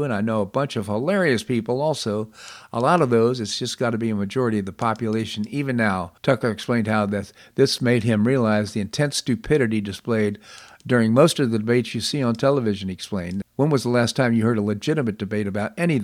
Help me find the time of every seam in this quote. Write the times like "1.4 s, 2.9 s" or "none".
6.2 s, 13.4 s